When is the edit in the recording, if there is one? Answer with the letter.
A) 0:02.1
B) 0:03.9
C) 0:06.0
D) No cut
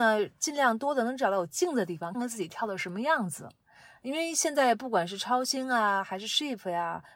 A